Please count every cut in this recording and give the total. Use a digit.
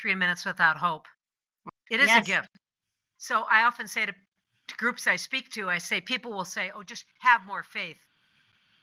1